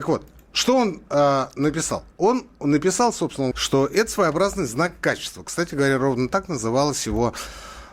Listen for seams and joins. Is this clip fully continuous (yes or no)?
no